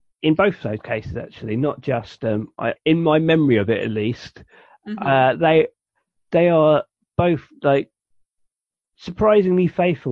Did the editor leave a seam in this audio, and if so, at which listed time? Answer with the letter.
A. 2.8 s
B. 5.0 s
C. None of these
A